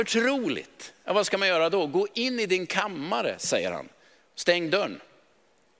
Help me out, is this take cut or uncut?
uncut